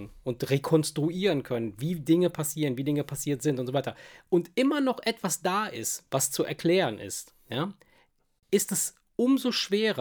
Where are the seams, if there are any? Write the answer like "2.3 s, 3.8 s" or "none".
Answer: none